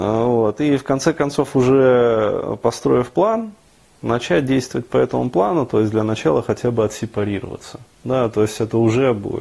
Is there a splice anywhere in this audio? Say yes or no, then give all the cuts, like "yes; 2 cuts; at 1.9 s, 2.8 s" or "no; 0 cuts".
no; 0 cuts